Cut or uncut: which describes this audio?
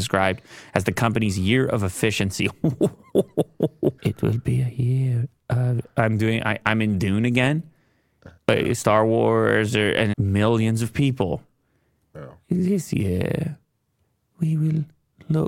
cut